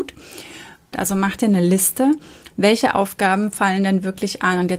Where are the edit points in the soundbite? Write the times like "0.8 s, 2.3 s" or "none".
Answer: 0.9 s

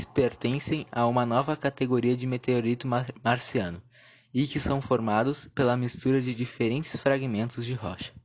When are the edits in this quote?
none

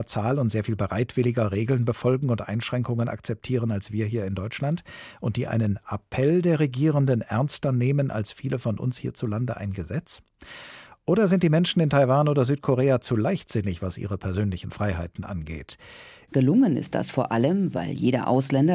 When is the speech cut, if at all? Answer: 16.3 s

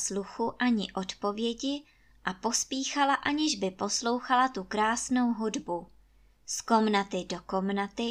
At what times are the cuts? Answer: none

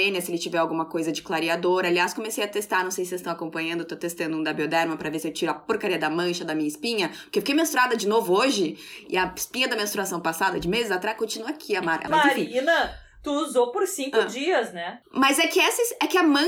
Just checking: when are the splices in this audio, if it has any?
12.1 s

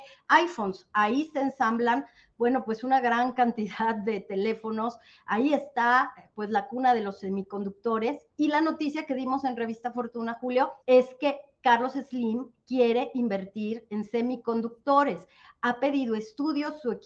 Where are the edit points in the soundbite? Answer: 10.8 s

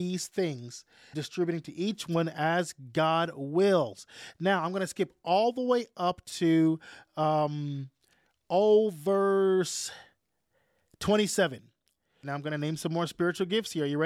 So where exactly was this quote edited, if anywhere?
1.1 s, 12.2 s

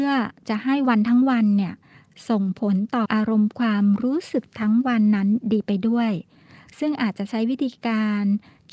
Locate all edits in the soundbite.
3.1 s

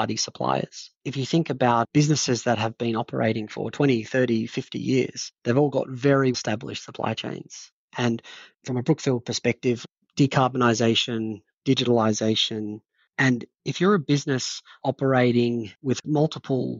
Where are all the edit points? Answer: 6.3 s, 7.9 s, 13.1 s

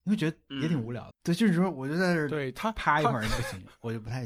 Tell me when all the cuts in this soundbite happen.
1.1 s

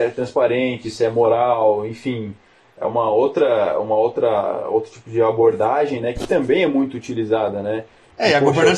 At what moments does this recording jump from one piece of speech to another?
none

